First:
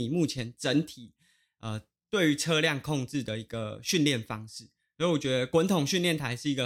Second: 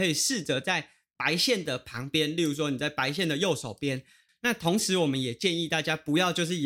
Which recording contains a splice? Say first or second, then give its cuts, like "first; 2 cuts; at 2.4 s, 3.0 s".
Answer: second; 1 cut; at 4.3 s